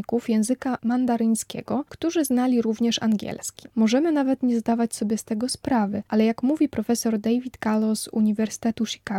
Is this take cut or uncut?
cut